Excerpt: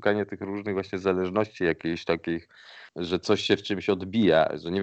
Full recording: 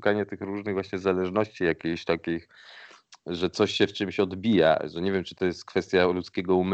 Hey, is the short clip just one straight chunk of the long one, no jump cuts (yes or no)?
no